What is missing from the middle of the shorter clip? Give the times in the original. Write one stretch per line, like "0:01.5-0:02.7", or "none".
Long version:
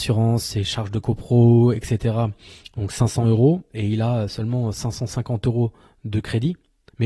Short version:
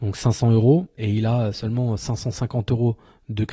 none